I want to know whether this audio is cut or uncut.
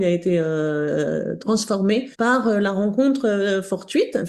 cut